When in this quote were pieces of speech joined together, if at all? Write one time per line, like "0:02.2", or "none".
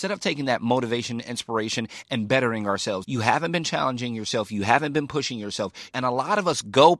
0:03.0
0:05.9